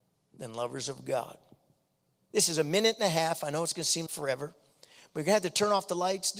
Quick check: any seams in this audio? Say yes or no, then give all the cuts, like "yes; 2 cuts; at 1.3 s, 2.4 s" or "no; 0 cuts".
yes; 2 cuts; at 2.3 s, 4.1 s